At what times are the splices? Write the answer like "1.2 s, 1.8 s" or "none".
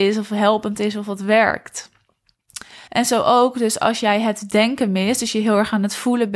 2.9 s